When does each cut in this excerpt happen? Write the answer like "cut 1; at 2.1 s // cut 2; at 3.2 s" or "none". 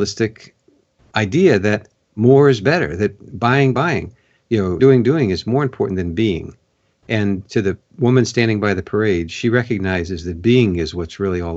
cut 1; at 3.7 s // cut 2; at 4.8 s